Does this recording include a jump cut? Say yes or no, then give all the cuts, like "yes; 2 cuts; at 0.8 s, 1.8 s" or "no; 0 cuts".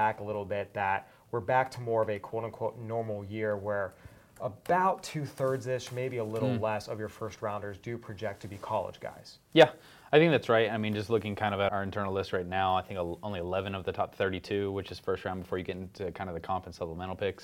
yes; 1 cut; at 11.7 s